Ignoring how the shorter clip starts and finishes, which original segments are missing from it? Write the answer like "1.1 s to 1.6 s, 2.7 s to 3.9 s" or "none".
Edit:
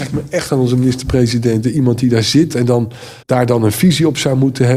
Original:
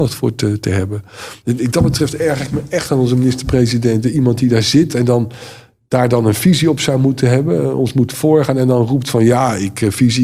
5.6 s to 5.8 s